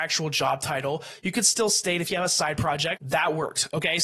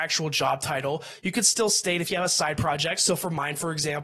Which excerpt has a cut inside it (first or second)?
first